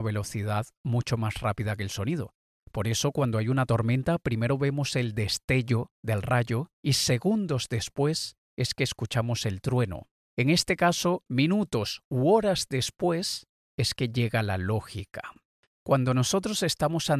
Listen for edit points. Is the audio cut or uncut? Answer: cut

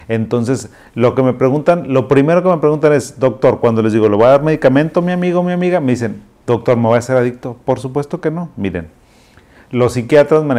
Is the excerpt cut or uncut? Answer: uncut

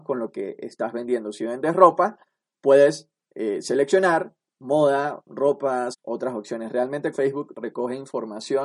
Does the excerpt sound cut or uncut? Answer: cut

